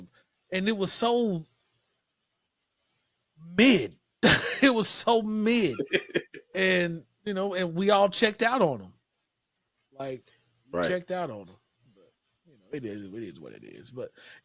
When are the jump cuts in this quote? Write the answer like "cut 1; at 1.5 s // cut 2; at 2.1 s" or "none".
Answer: none